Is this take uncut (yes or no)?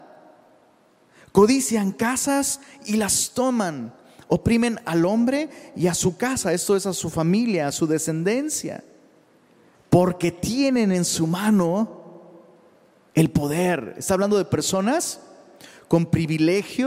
no